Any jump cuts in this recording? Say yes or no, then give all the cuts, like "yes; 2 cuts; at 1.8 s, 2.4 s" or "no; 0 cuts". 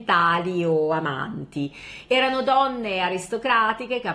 yes; 1 cut; at 2.0 s